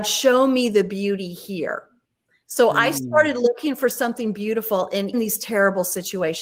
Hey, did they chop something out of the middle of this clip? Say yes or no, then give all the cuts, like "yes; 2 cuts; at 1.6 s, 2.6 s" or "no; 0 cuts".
yes; 1 cut; at 5.1 s